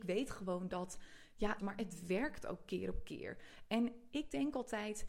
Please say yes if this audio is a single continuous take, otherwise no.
no